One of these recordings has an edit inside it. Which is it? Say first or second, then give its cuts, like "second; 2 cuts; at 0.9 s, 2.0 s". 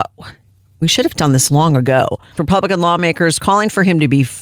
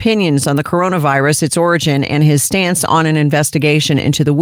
first; 1 cut; at 2.4 s